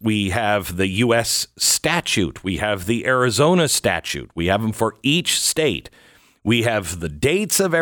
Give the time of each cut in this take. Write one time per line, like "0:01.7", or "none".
none